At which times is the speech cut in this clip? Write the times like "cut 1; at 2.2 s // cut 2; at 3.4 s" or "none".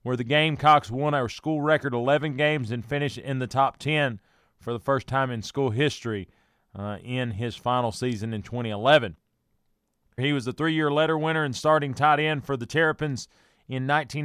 cut 1; at 10.2 s